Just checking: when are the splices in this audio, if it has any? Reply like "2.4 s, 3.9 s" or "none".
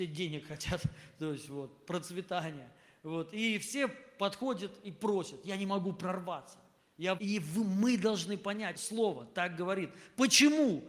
7.2 s, 8.8 s